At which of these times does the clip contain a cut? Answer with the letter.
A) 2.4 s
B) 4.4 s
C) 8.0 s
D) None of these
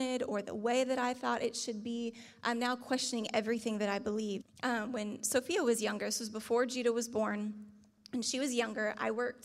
B